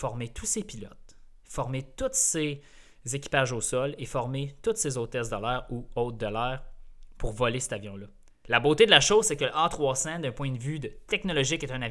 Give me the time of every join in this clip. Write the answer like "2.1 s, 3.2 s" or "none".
8.4 s